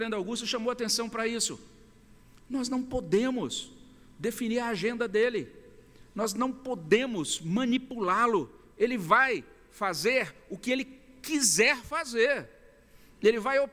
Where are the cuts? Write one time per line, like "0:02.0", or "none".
0:08.7